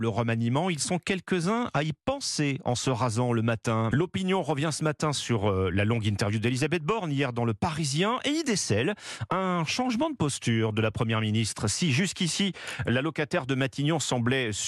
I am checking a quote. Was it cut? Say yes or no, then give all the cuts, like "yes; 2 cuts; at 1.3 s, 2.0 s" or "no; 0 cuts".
yes; 1 cut; at 3.9 s